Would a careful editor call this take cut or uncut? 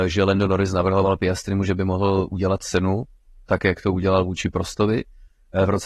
uncut